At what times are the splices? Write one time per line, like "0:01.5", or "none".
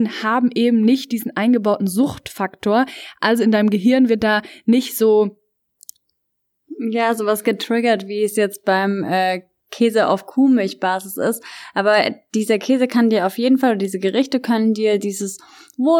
none